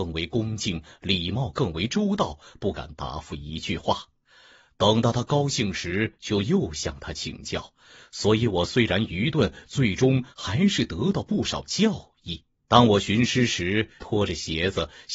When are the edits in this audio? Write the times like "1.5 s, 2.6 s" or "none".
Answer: 12.5 s, 14.0 s